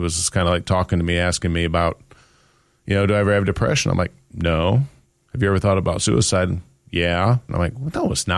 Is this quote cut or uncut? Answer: cut